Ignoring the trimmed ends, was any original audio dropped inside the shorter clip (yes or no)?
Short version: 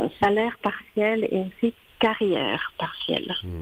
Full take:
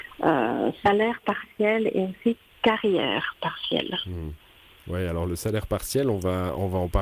no